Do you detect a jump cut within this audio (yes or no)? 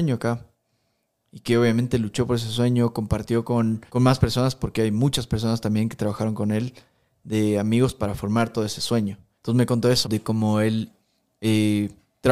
yes